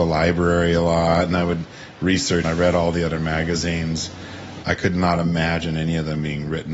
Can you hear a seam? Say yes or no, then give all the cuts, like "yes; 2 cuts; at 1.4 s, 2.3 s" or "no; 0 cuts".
yes; 2 cuts; at 2.4 s, 4.6 s